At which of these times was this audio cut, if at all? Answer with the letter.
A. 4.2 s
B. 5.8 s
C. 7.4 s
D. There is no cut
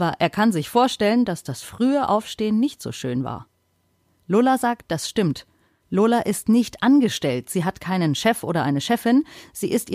B